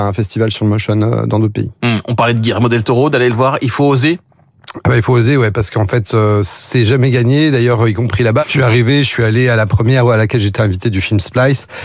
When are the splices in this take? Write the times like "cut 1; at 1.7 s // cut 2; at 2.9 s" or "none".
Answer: cut 1; at 8.4 s